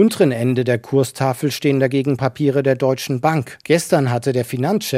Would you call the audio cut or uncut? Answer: cut